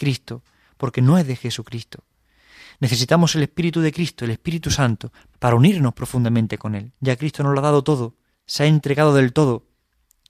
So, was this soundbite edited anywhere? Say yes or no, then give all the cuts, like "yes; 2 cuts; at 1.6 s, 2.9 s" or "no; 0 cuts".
yes; 2 cuts; at 5.3 s, 7.0 s